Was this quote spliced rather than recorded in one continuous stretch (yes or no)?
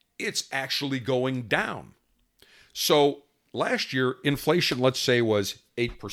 no